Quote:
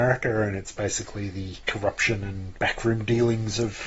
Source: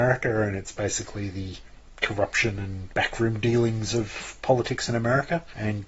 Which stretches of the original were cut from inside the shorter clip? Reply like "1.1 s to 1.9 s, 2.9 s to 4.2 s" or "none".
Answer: 1.6 s to 2.0 s